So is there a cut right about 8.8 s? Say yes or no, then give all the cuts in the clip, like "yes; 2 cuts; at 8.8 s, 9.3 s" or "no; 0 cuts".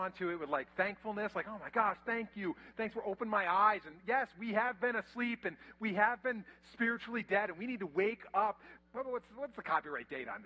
yes; 1 cut; at 8.8 s